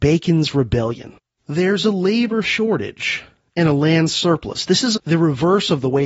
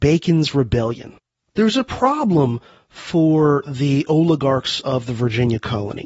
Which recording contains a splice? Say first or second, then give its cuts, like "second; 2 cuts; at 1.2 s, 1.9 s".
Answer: first; 2 cuts; at 1.4 s, 4.9 s